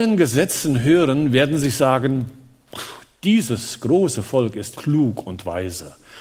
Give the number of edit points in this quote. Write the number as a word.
one